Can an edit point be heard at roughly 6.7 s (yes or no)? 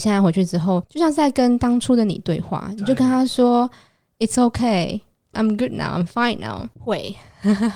yes